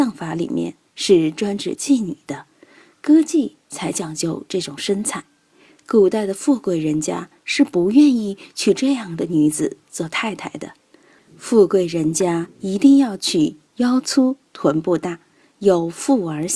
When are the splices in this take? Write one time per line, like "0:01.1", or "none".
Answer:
none